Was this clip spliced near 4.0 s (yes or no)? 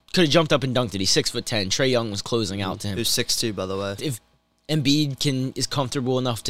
yes